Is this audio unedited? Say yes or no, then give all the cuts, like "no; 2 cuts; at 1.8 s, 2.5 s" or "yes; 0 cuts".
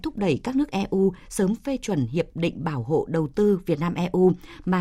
yes; 0 cuts